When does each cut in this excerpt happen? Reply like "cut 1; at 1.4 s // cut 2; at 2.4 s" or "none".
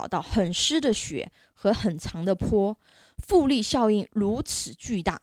none